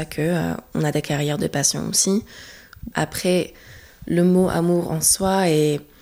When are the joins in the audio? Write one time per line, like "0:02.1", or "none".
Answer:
0:02.9